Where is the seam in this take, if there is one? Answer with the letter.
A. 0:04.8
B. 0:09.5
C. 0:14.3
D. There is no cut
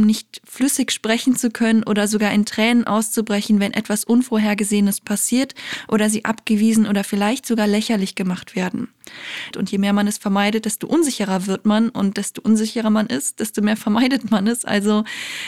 B